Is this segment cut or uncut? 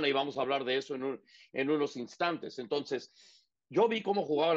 uncut